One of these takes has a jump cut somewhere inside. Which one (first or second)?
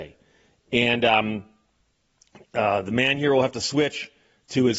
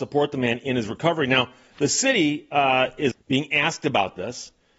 second